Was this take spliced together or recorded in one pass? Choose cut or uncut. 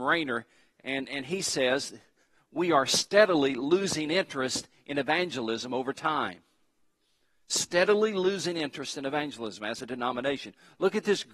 uncut